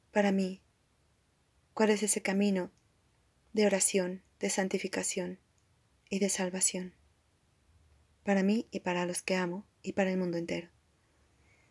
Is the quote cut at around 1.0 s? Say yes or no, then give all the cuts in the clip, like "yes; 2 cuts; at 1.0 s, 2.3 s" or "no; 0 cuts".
no; 0 cuts